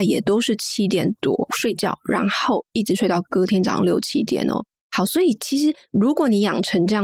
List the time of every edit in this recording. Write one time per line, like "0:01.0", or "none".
none